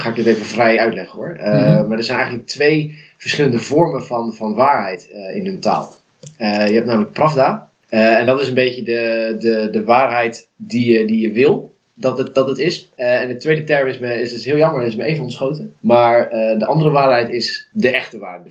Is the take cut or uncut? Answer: uncut